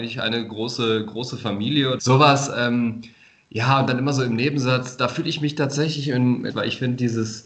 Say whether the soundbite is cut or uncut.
cut